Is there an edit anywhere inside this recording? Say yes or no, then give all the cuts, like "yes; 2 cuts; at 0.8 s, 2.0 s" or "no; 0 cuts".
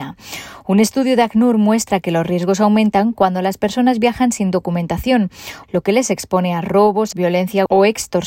yes; 2 cuts; at 5.6 s, 7.1 s